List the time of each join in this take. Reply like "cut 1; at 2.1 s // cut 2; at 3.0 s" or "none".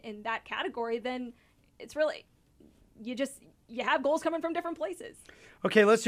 none